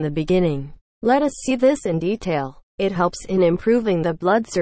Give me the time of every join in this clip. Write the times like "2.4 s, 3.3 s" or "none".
2.7 s